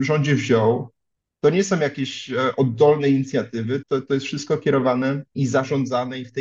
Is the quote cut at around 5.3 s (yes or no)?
yes